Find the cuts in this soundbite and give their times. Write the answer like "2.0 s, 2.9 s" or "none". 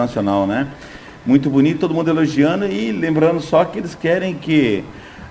none